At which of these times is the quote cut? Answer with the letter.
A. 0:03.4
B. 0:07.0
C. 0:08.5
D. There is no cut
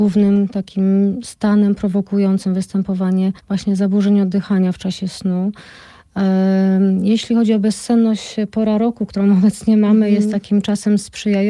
A